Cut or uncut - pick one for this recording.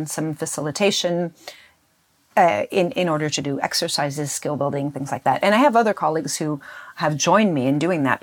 uncut